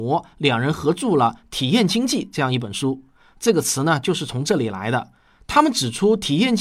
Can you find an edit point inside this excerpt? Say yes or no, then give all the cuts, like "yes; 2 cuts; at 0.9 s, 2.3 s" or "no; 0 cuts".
no; 0 cuts